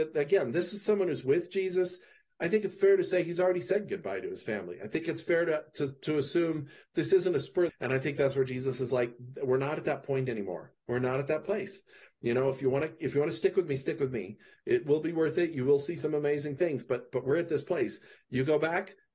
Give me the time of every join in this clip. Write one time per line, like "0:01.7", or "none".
0:07.7